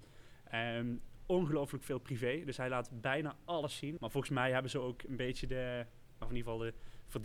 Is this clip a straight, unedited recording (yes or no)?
no